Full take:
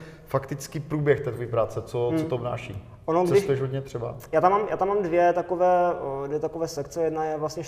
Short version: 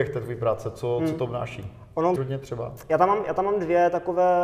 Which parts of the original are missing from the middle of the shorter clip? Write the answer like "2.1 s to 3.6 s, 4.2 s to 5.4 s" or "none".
3.3 s to 3.6 s